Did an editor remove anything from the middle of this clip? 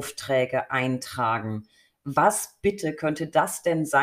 no; 0 cuts

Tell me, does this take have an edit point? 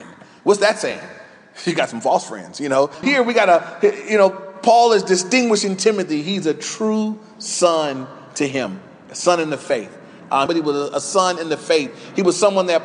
yes; 1 cut; at 10.5 s

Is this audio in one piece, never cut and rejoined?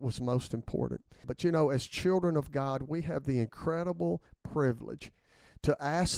no; 1 cut; at 1.2 s

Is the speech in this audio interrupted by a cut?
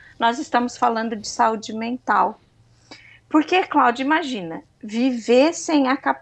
no; 0 cuts

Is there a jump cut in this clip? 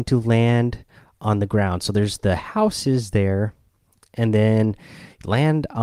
no; 0 cuts

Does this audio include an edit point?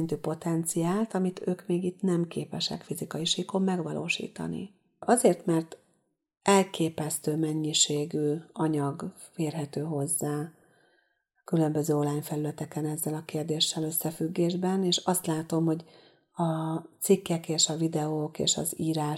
yes; 1 cut; at 5.0 s

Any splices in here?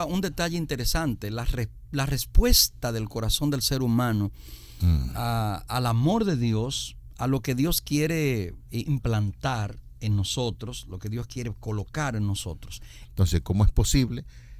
yes; 1 cut; at 13.1 s

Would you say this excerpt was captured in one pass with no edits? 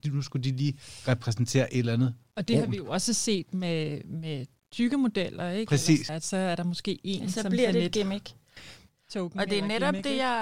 yes; 0 cuts

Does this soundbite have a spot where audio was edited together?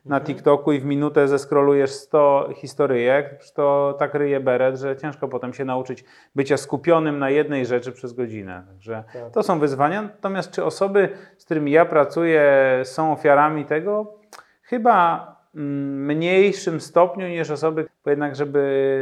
yes; 1 cut; at 17.9 s

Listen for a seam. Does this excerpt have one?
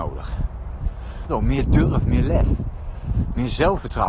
yes; 1 cut; at 1.3 s

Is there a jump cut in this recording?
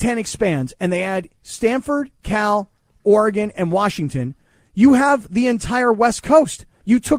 no; 0 cuts

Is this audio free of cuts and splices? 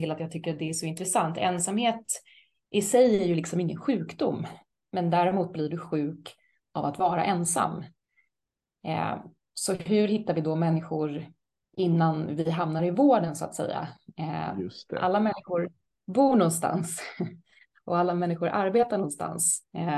yes; 0 cuts

